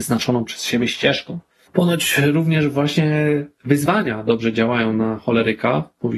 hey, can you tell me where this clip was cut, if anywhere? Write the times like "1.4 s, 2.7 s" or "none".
none